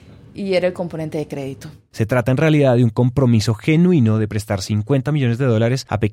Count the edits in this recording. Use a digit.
1